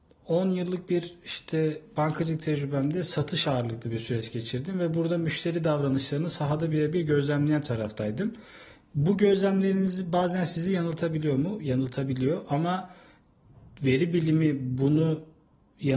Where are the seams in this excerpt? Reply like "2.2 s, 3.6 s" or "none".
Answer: none

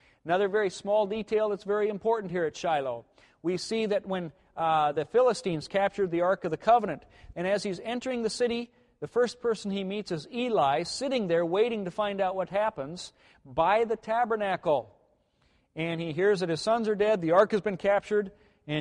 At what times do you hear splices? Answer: 7.3 s

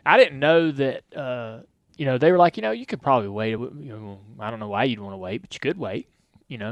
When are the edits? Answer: none

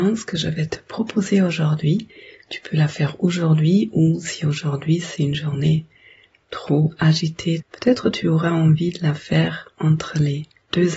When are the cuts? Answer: 7.6 s

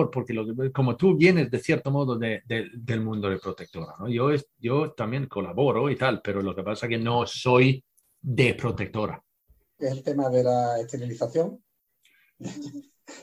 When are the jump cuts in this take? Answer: 9.8 s

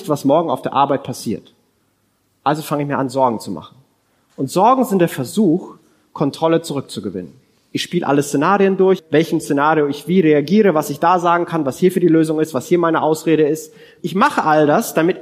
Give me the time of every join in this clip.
9.0 s, 14.0 s

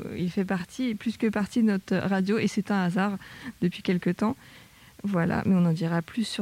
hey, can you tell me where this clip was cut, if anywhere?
none

